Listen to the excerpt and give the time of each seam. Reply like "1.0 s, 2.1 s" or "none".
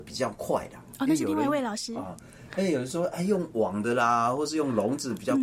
none